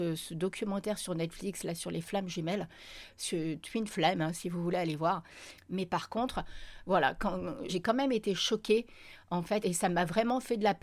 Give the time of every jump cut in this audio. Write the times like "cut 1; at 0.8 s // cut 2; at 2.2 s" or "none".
cut 1; at 5.6 s // cut 2; at 7.7 s // cut 3; at 9.6 s